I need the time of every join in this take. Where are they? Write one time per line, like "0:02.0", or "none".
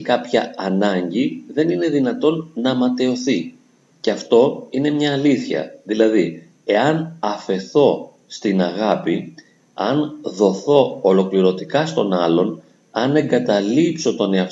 0:03.9
0:09.6

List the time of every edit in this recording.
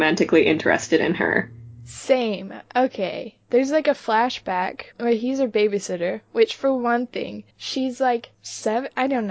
0:03.5
0:04.9

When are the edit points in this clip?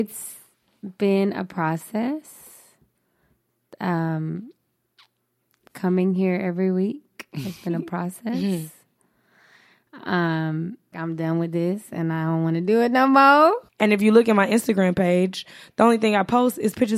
0:10.9
0:13.7

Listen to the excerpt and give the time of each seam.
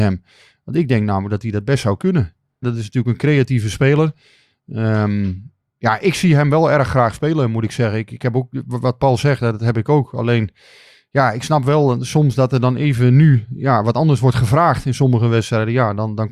0:02.6

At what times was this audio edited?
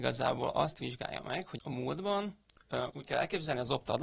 0:01.6
0:02.9

